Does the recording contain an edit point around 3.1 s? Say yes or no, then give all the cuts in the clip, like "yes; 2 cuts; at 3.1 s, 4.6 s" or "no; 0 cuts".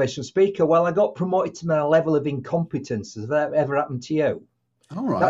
no; 0 cuts